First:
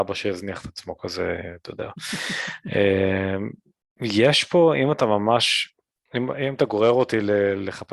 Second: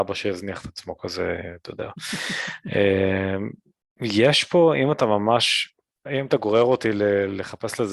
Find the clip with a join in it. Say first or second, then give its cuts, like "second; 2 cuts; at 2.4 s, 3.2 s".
second; 1 cut; at 6.0 s